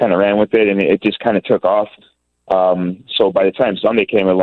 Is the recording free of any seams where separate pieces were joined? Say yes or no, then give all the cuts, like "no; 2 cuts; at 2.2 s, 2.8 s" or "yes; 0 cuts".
yes; 0 cuts